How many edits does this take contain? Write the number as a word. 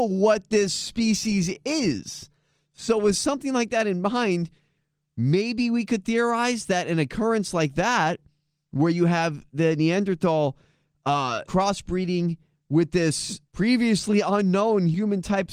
two